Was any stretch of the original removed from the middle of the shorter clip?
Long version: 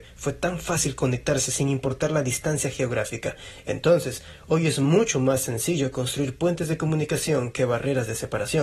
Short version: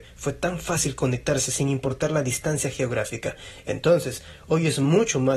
no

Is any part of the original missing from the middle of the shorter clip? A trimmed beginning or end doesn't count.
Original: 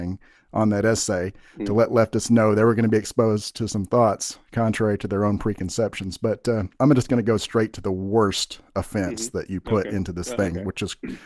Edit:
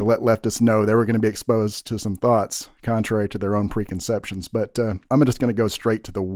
no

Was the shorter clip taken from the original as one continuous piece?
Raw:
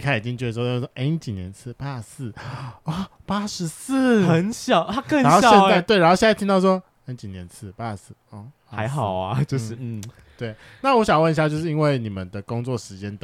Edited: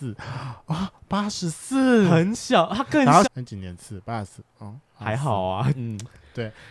no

